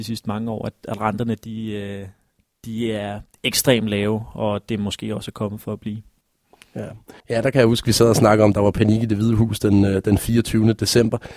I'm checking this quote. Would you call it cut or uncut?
cut